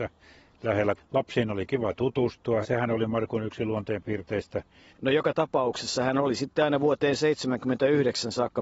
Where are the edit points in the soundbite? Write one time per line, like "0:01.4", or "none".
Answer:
0:01.0
0:02.6
0:04.9